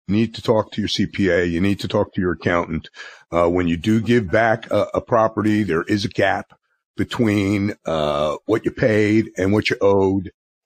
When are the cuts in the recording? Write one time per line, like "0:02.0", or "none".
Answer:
none